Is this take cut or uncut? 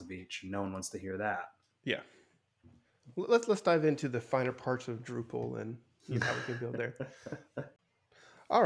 uncut